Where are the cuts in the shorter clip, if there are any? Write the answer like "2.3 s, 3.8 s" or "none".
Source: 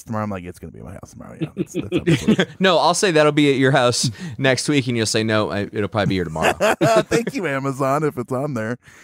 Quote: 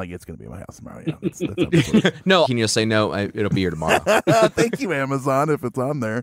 2.5 s, 3.5 s

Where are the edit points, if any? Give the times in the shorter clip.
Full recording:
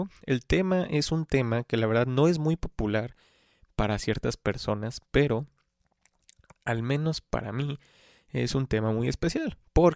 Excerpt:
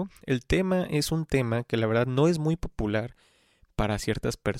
none

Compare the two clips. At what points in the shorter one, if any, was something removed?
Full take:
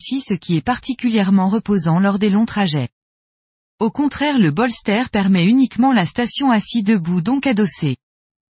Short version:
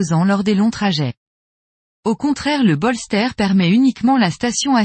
none

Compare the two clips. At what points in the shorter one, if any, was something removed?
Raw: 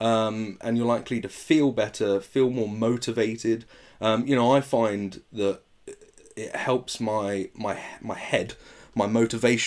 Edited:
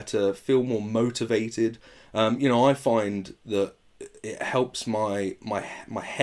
4.2 s

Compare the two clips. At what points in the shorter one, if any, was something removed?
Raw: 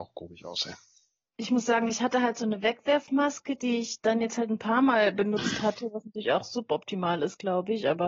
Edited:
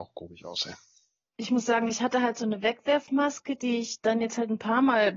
none

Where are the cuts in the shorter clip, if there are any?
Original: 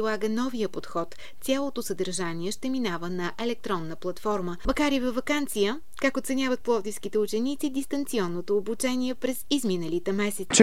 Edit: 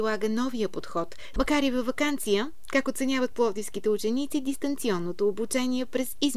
1.3 s

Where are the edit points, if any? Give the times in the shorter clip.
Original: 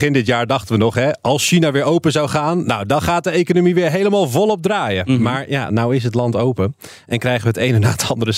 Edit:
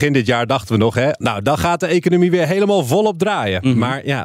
1.2 s

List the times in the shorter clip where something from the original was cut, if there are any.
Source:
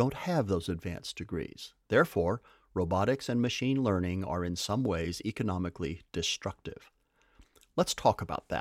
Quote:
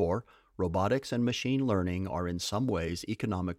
none

